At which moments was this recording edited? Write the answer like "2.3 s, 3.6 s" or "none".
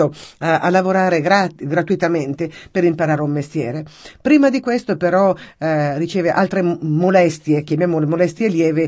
none